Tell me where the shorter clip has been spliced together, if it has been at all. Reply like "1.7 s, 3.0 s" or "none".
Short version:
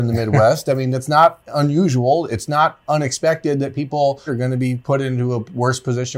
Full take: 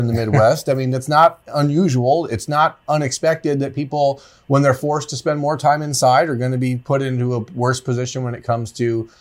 4.3 s